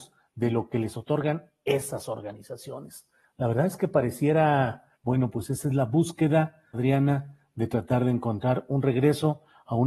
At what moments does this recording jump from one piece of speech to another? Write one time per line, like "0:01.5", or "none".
0:04.9
0:06.7

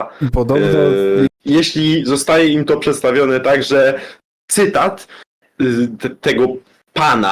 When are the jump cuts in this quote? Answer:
0:01.3
0:05.4

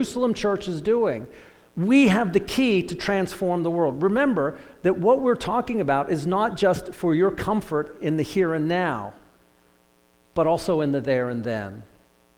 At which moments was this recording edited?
none

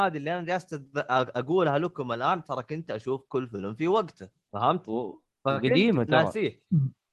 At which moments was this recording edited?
0:04.5

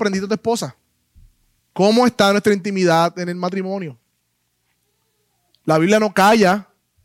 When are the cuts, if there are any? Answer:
0:01.6

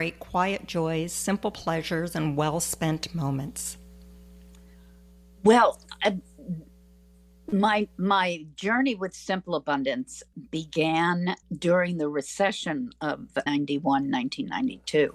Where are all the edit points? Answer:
none

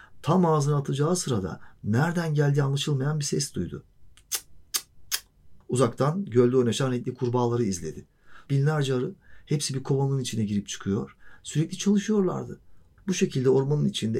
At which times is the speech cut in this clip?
0:05.6
0:08.5
0:13.0

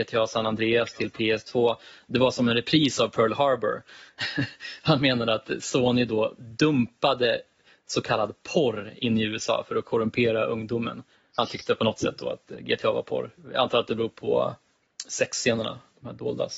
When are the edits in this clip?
none

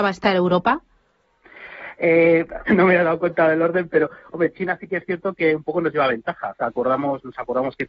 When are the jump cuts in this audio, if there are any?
0:02.7

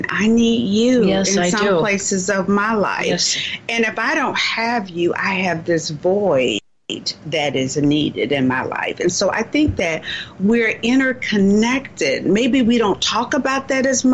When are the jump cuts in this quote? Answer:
none

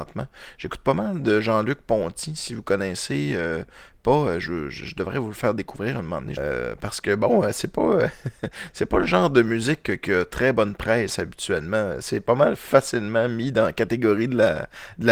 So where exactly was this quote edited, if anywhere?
0:06.4

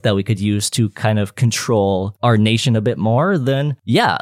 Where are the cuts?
none

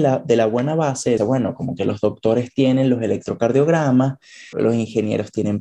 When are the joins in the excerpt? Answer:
0:01.2
0:04.5

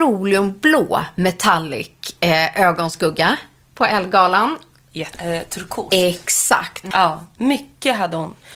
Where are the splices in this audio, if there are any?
0:05.1
0:06.9

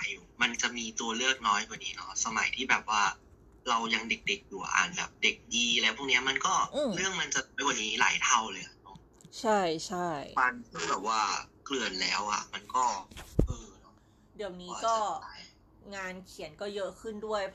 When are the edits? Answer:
none

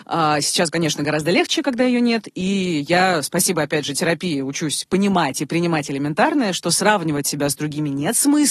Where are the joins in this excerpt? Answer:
none

